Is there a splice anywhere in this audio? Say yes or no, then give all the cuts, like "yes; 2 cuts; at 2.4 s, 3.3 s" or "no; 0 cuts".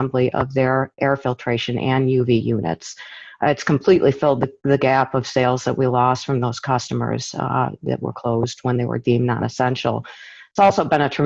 no; 0 cuts